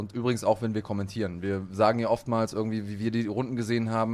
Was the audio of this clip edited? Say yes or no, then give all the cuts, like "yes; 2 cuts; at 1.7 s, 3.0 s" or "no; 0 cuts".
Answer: no; 0 cuts